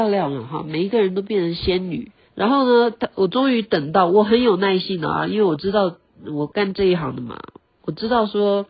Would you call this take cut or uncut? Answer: cut